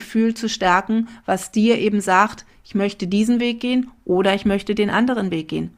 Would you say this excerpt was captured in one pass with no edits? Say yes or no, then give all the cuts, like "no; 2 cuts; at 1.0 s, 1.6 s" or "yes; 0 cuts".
yes; 0 cuts